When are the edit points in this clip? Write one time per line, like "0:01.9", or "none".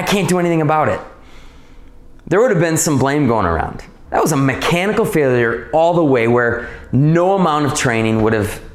0:04.1